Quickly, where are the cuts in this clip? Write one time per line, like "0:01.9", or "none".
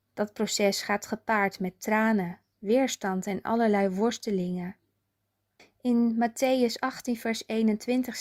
0:05.6